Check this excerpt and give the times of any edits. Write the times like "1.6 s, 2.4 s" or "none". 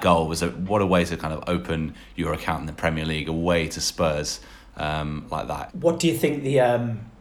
5.7 s